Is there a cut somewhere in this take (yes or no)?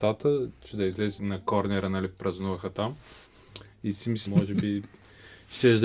yes